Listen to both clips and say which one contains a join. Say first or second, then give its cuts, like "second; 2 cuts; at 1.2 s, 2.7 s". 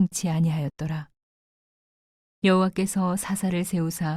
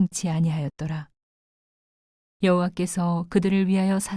first; 1 cut; at 2.2 s